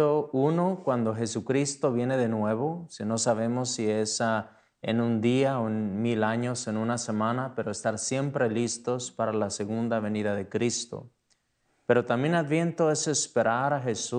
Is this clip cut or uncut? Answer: uncut